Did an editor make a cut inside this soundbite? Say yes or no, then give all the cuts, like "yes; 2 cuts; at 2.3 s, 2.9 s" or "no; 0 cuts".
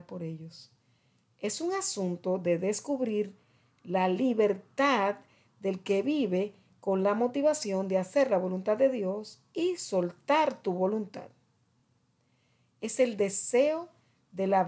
no; 0 cuts